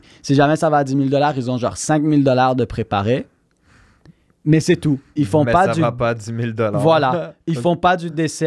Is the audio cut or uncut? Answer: uncut